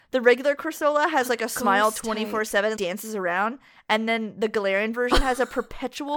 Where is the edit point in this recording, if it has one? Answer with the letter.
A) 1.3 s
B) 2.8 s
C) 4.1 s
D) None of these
B